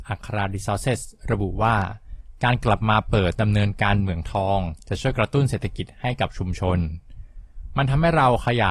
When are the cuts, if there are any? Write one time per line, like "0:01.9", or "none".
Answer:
0:03.3

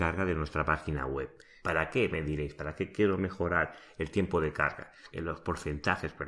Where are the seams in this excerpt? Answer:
0:01.6
0:05.1

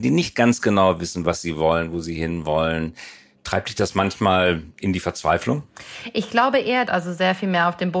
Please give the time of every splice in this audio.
0:06.9

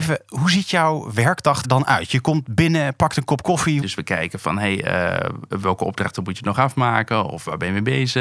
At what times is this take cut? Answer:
0:01.6
0:03.8

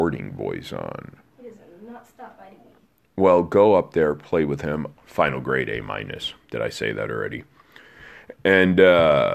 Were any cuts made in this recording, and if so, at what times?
0:04.9

